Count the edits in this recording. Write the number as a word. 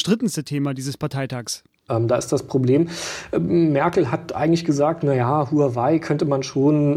one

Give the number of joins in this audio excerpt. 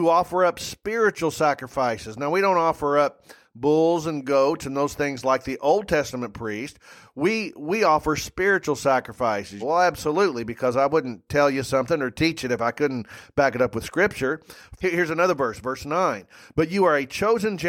two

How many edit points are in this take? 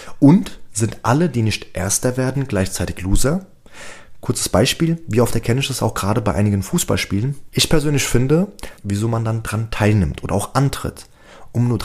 two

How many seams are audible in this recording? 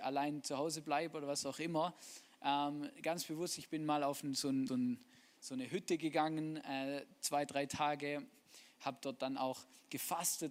one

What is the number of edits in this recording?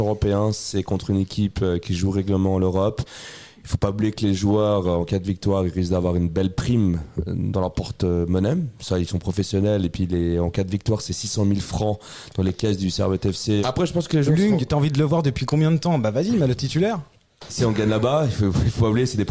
two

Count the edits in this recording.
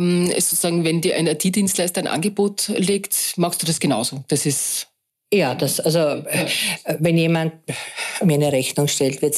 zero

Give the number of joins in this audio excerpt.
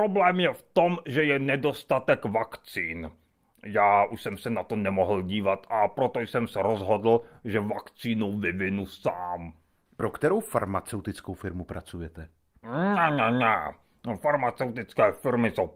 one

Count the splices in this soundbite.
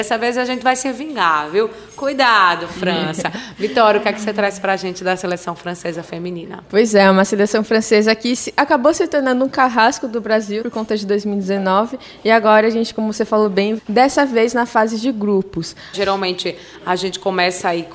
three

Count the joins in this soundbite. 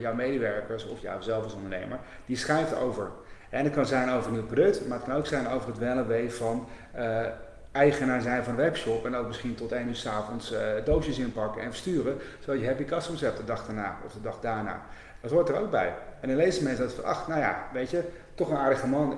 zero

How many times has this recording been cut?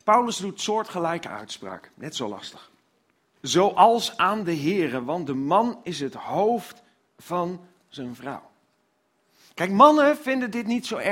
one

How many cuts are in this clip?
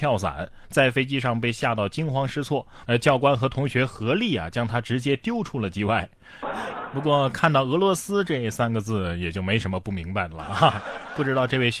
two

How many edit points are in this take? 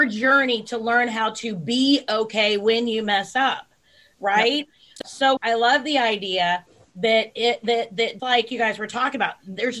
two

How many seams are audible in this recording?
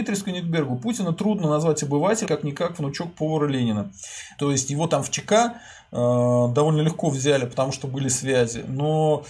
two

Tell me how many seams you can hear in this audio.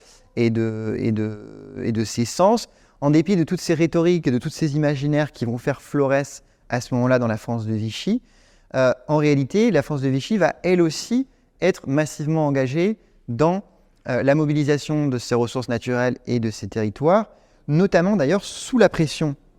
zero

